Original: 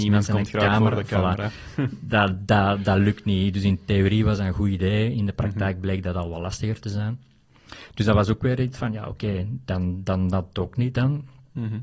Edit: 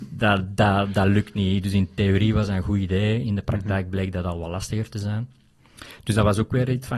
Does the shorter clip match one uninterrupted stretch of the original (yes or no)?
yes